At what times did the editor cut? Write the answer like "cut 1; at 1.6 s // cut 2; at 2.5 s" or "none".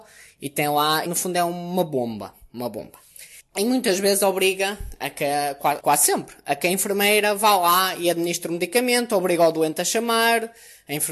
cut 1; at 1.1 s // cut 2; at 3.4 s // cut 3; at 5.8 s